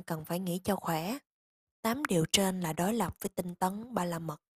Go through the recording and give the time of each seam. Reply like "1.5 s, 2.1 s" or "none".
1.7 s